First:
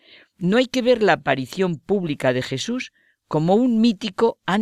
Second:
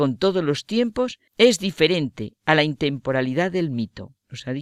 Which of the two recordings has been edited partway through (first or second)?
second